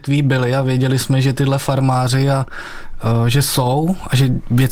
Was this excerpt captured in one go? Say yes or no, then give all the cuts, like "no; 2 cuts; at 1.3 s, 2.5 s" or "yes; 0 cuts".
yes; 0 cuts